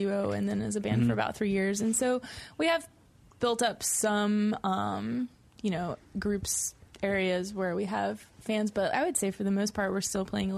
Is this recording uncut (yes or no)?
yes